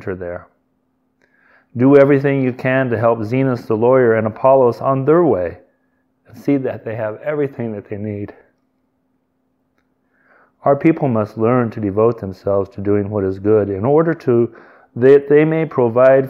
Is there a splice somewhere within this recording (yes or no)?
no